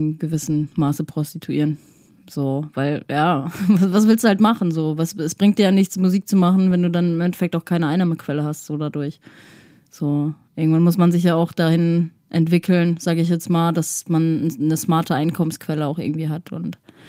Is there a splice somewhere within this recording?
no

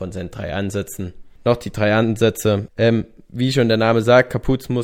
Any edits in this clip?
yes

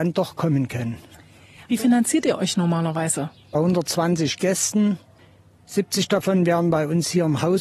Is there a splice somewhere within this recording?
yes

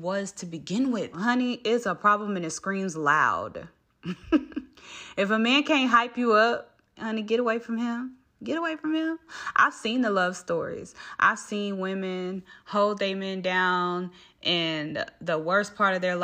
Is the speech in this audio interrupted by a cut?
yes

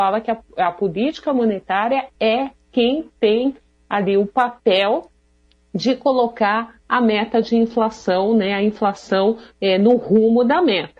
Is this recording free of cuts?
yes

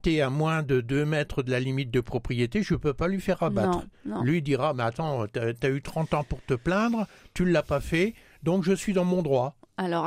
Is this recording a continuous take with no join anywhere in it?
yes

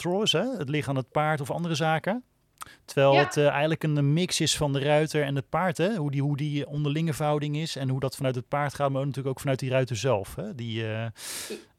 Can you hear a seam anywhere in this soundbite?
no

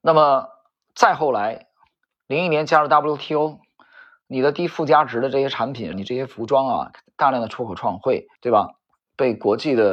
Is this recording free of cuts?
no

